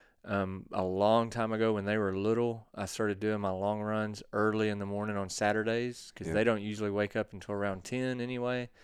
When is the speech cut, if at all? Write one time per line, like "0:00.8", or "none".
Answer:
none